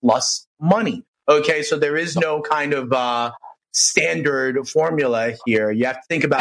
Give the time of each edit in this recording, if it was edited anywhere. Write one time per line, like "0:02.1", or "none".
none